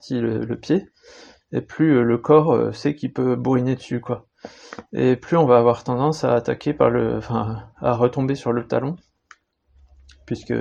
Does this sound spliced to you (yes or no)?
no